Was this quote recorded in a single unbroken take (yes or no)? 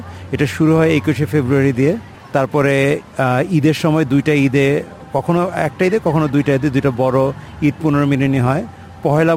yes